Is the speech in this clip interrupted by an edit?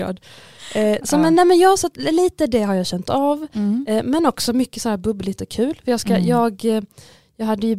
no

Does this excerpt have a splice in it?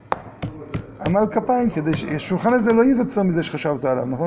yes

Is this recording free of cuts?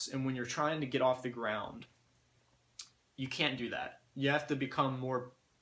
yes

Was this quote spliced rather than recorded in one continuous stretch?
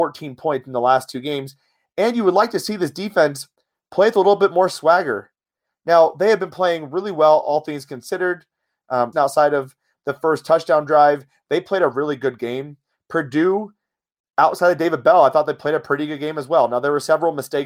yes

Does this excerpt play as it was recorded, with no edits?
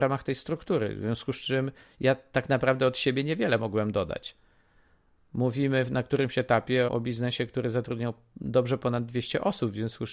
no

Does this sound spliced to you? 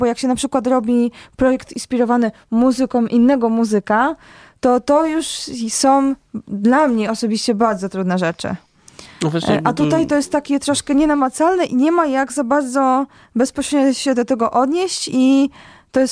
no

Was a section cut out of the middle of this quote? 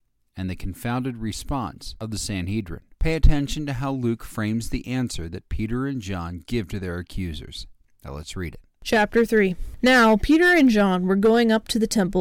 yes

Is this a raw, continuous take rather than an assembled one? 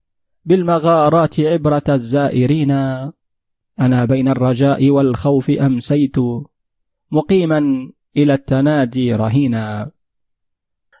yes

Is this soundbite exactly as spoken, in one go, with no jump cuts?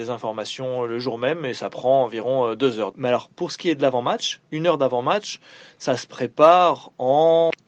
no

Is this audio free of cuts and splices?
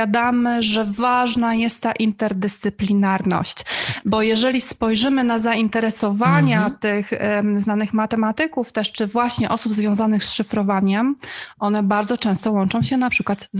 yes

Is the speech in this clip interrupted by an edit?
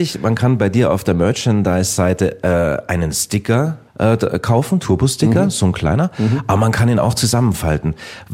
yes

